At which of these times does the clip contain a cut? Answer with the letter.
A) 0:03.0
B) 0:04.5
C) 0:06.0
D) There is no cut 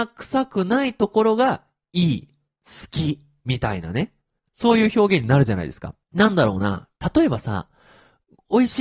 C